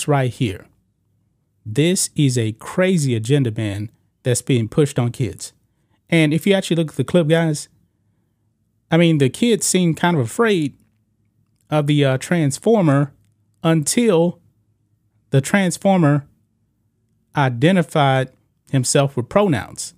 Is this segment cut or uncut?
uncut